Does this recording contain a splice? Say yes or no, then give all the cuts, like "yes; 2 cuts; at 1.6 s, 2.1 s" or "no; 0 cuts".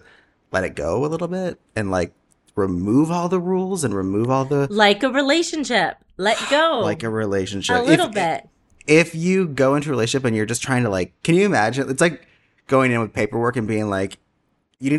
no; 0 cuts